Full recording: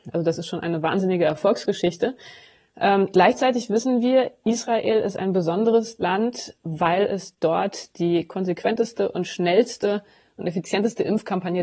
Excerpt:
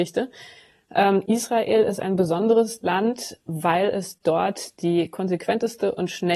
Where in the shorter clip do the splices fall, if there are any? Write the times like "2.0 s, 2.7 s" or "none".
1.3 s